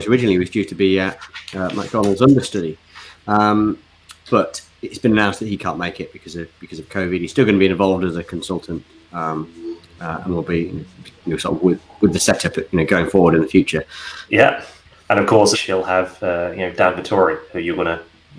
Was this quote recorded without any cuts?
no; 2 cuts; at 14.3 s, 15.5 s

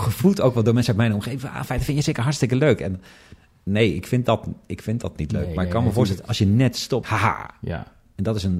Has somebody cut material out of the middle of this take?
yes; 1 cut; at 7.0 s

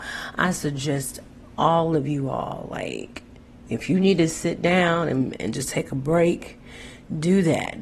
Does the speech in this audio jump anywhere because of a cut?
no; 0 cuts

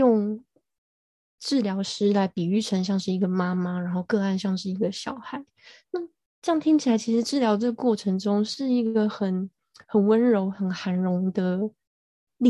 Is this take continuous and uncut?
yes; 0 cuts

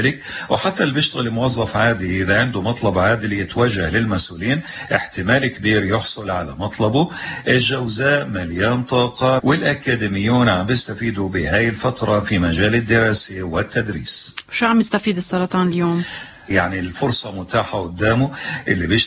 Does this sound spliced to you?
yes; 2 cuts; at 9.4 s, 16.5 s

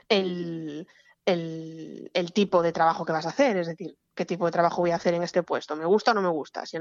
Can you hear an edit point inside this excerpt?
no; 0 cuts

